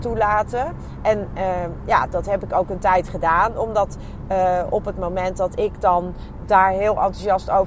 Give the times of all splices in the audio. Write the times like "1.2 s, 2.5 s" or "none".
none